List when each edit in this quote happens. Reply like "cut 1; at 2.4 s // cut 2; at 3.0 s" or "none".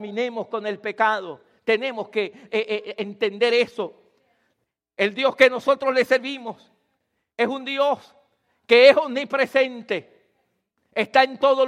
none